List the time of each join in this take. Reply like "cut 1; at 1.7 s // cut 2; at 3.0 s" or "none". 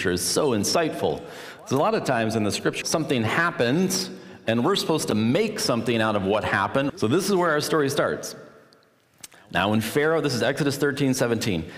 cut 1; at 2.8 s // cut 2; at 6.9 s